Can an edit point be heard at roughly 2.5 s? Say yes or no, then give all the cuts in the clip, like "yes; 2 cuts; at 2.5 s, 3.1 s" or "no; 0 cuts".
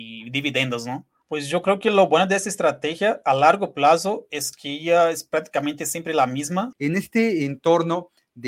no; 2 cuts; at 1.2 s, 6.7 s